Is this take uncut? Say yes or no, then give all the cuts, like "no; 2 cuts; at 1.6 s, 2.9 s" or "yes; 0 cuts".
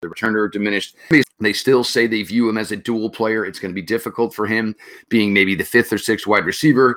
no; 1 cut; at 1.2 s